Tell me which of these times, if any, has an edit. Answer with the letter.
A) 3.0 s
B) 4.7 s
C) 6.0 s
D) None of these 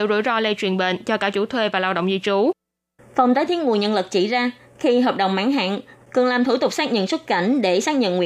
C